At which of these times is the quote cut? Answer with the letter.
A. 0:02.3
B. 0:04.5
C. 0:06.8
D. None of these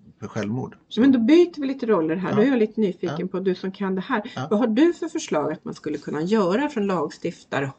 D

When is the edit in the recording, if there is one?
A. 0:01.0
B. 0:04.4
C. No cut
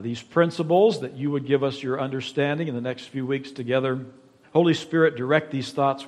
B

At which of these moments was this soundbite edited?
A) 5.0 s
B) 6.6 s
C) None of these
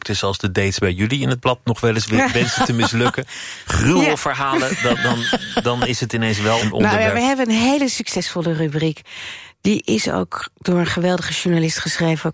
B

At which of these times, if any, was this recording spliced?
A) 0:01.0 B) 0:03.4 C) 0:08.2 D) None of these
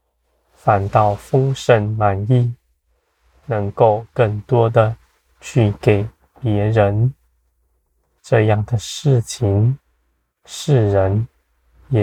C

